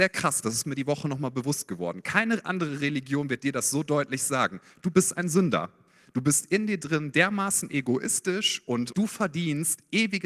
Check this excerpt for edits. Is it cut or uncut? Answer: cut